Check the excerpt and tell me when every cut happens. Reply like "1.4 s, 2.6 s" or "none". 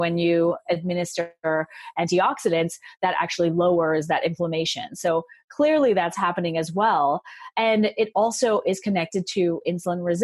none